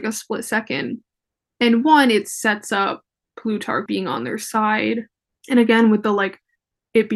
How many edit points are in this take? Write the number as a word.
two